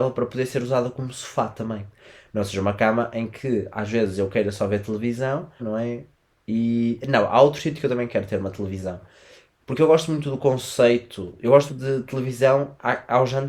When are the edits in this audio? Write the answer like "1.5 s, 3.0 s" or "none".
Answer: 5.6 s, 11.7 s